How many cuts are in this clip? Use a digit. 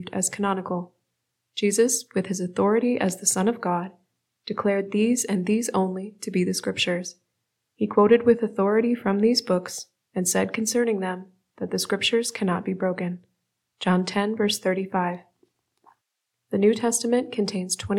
0